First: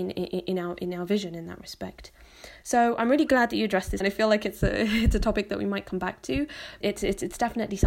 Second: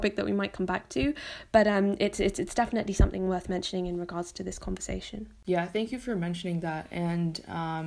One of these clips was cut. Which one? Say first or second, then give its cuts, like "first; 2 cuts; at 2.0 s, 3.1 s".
first; 2 cuts; at 4.0 s, 6.8 s